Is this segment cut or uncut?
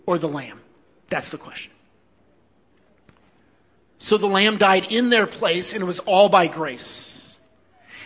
uncut